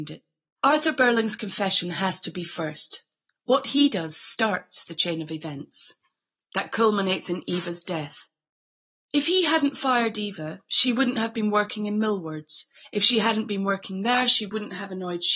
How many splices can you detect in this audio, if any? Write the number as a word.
zero